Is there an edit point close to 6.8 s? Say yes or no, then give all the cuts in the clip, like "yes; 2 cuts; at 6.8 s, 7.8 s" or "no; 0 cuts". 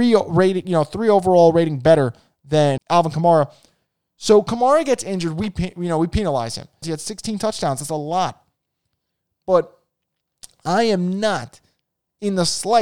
yes; 2 cuts; at 2.8 s, 6.8 s